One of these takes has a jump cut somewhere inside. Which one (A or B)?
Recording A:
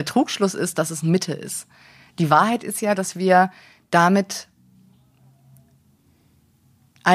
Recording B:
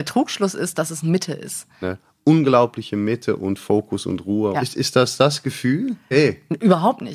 B